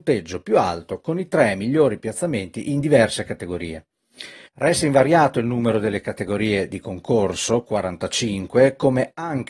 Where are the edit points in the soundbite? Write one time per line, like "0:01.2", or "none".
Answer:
0:04.4